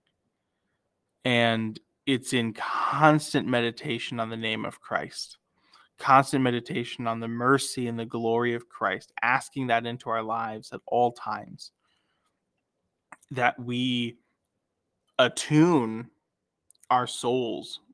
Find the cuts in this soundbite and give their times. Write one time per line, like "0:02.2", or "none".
none